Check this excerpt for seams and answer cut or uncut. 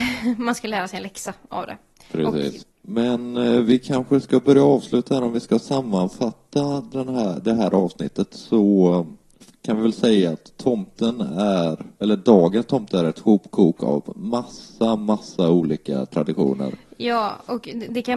cut